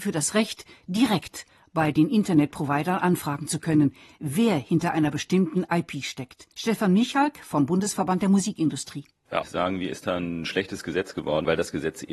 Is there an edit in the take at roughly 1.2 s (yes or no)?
no